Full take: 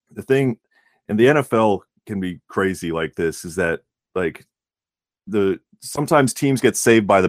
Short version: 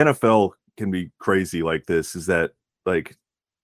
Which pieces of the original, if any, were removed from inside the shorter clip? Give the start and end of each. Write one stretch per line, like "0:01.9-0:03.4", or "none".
none

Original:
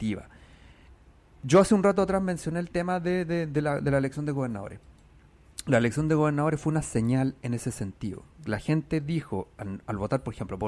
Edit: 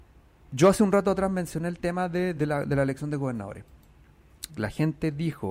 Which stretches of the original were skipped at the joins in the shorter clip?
0:03.3-0:03.5
0:05.6-0:08.4

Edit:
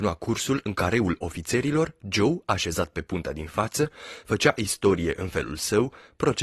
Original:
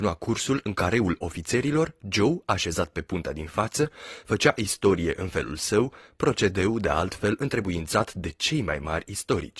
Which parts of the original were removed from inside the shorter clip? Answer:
none

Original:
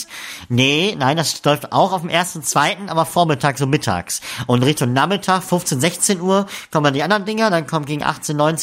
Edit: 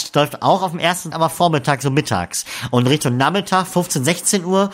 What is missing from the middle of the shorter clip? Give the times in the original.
0:02.4-0:02.9

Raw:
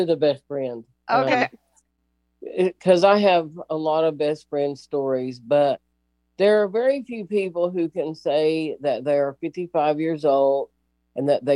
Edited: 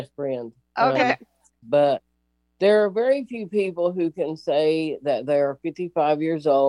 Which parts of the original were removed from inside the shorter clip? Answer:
0:01.9-0:05.4

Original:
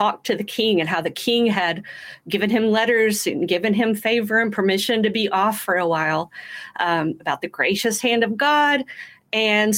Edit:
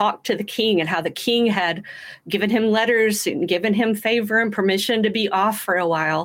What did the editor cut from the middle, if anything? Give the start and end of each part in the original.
none

